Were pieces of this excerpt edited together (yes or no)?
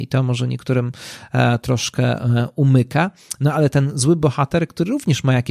no